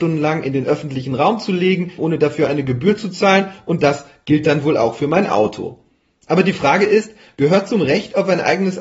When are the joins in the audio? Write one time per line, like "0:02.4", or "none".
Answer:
0:02.0